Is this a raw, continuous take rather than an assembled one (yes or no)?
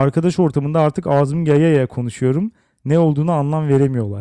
yes